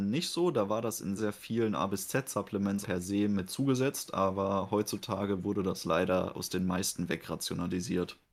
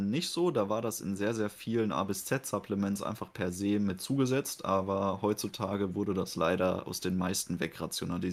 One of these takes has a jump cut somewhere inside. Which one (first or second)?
first